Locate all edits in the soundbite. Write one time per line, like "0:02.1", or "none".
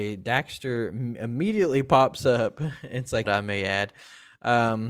0:03.3